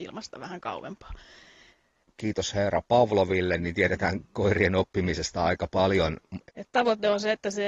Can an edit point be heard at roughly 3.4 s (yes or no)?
no